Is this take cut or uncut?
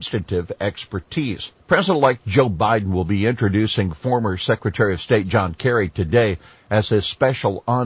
cut